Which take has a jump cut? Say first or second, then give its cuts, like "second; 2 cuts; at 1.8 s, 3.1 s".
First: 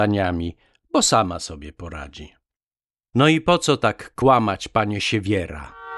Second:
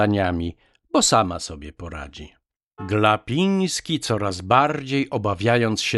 second; 1 cut; at 2.8 s